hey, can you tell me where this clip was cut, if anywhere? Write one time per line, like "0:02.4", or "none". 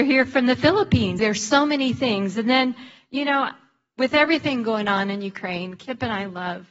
0:01.2

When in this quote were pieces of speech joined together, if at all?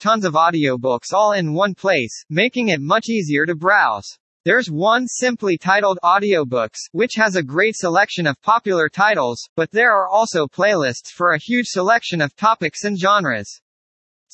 0:04.4

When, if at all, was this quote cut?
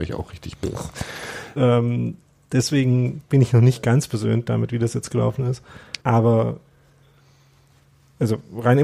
0:01.6
0:06.0

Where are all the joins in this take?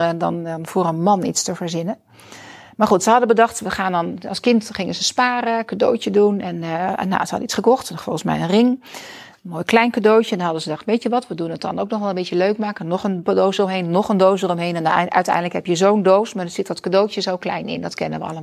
none

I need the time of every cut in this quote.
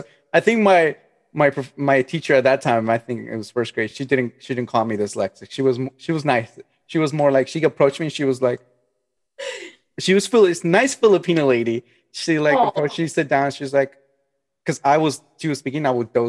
none

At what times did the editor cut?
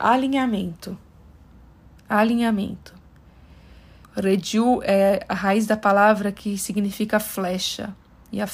0:04.0

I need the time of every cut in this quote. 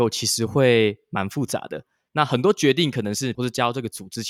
0:03.3

